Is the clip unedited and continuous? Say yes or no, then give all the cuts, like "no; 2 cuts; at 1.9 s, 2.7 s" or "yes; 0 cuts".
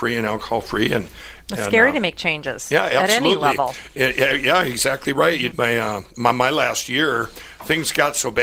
no; 1 cut; at 5.5 s